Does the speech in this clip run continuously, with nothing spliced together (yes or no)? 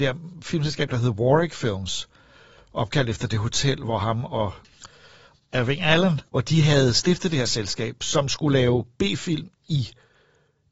no